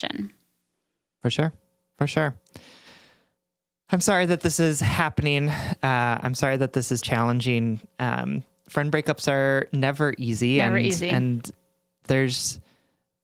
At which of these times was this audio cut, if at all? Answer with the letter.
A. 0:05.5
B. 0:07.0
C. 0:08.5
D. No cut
B